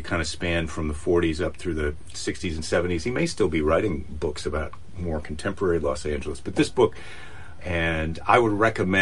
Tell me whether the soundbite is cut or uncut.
cut